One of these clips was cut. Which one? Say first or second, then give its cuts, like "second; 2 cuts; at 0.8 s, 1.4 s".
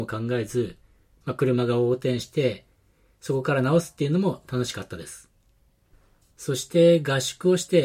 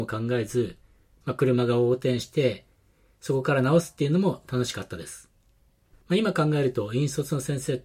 second; 1 cut; at 6.0 s